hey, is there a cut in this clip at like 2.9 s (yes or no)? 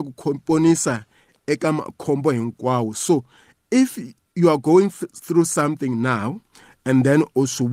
no